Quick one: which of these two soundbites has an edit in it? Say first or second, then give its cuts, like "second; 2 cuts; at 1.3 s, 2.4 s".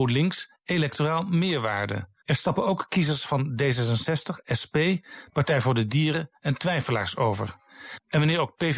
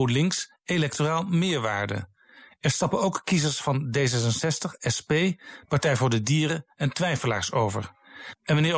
first; 1 cut; at 2.2 s